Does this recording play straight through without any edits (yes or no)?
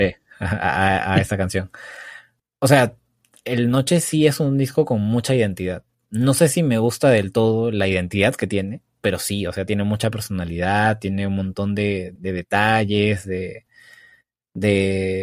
no